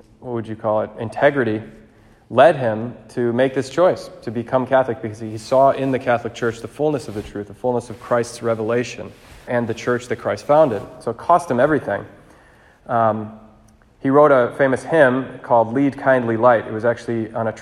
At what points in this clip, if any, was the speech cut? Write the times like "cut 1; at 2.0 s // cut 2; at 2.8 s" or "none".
cut 1; at 9.5 s